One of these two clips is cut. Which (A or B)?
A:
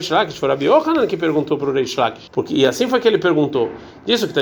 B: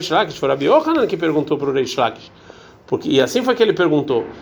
A